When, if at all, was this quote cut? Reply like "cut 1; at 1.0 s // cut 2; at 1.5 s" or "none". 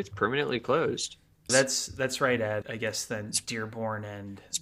cut 1; at 1.5 s // cut 2; at 2.6 s